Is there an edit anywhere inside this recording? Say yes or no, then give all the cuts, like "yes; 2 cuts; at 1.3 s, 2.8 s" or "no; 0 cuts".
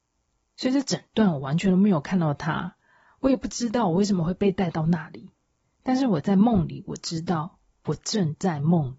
no; 0 cuts